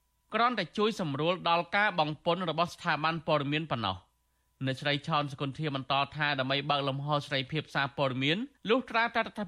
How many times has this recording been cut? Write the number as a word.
one